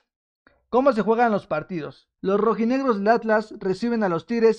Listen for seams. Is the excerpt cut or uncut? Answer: cut